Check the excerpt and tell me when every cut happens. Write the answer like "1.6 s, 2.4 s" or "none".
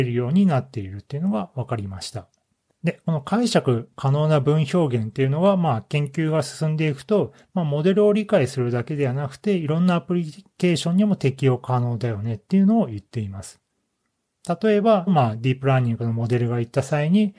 2.7 s, 15.1 s